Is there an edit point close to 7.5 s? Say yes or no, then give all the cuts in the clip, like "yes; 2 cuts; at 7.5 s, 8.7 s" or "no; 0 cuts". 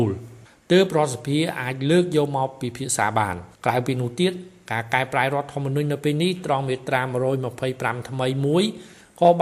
no; 1 cut; at 3.5 s